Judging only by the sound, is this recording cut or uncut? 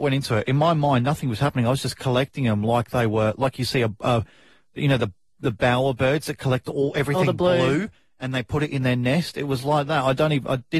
uncut